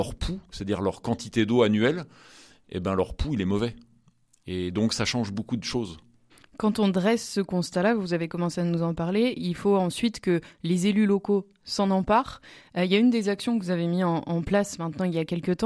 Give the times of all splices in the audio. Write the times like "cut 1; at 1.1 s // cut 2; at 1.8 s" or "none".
none